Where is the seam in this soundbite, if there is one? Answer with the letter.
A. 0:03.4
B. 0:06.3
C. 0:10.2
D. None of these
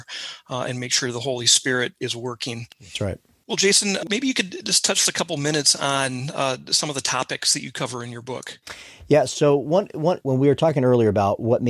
C